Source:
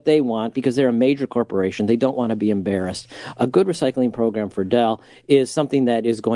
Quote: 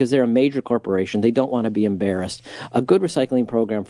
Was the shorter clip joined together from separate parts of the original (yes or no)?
no